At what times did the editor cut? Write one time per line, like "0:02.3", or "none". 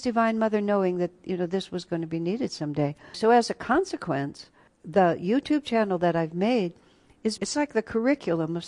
0:03.1
0:04.7
0:07.4